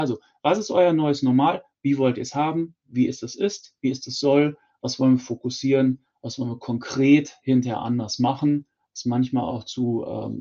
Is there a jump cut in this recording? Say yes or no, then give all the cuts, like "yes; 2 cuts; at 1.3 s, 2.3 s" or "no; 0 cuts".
no; 0 cuts